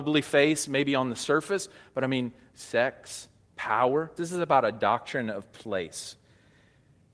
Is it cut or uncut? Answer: cut